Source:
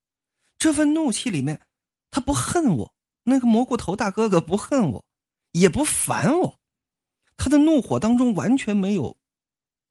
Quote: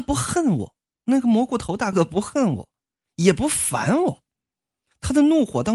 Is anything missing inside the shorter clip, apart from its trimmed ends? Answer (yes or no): yes